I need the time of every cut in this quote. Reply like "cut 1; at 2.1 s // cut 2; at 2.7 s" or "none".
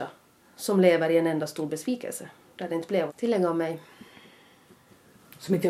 cut 1; at 3.1 s

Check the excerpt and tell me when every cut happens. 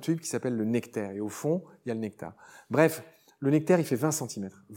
none

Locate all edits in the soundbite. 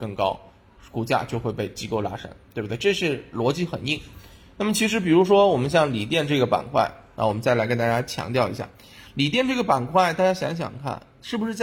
none

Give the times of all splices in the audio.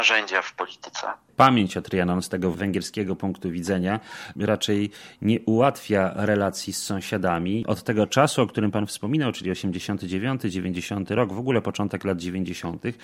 none

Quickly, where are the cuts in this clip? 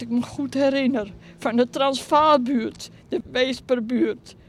cut 1; at 3.0 s

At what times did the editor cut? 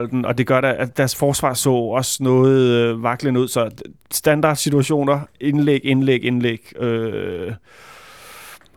cut 1; at 5.8 s

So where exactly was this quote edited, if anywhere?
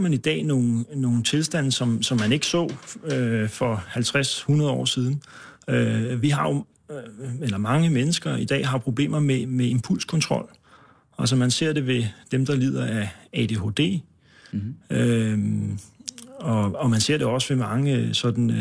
none

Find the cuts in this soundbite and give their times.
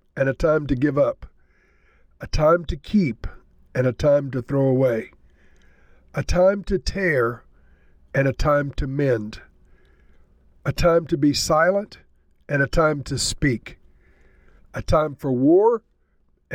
cut 1; at 14.6 s

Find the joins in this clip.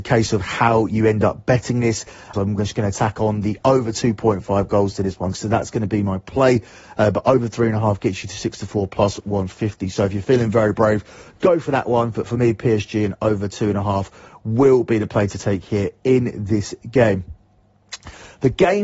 cut 1; at 2.3 s // cut 2; at 5.3 s

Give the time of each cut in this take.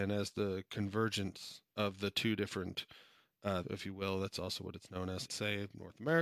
cut 1; at 3.6 s // cut 2; at 5.3 s

